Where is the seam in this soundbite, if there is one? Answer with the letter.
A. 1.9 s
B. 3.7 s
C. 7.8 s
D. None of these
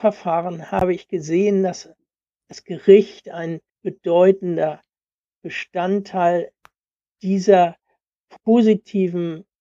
B